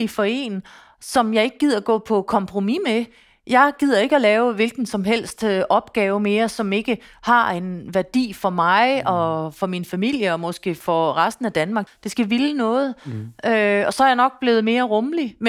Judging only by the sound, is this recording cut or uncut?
cut